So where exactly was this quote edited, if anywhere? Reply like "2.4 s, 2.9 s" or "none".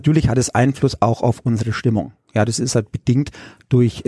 2.5 s